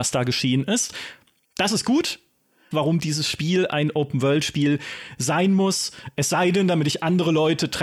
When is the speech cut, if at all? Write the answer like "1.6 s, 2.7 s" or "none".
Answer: 2.7 s